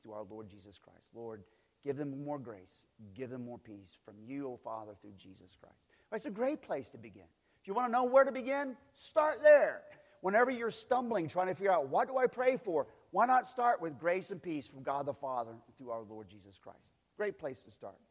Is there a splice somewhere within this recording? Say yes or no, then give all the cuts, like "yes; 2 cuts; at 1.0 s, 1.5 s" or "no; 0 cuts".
no; 0 cuts